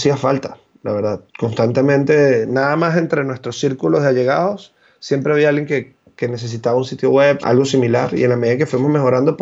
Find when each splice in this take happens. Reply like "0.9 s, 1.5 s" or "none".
1.3 s, 7.4 s